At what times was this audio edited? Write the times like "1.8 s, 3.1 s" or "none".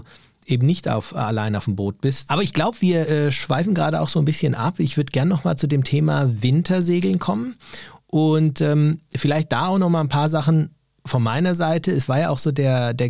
2.3 s